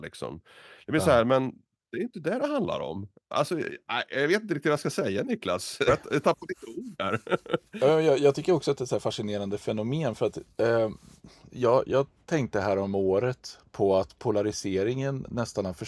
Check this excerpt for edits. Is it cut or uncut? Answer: cut